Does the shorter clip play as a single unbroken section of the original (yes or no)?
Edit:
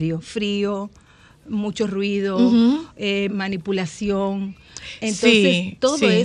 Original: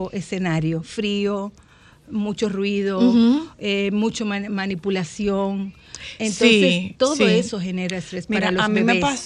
no